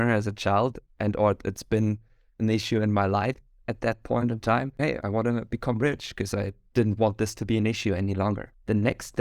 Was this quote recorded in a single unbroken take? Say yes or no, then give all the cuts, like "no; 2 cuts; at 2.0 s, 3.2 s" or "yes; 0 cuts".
no; 1 cut; at 4.8 s